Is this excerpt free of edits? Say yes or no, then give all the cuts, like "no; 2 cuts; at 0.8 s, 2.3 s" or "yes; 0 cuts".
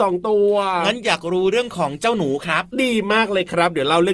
yes; 0 cuts